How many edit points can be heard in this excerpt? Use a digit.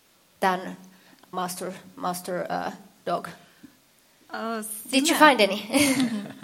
1